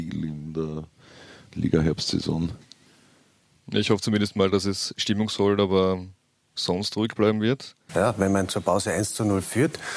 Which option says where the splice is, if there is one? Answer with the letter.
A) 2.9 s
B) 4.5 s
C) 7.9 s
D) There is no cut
C